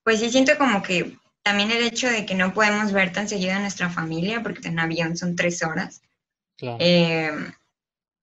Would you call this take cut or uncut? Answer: cut